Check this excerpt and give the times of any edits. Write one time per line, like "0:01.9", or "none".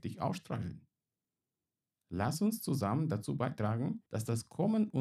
0:04.1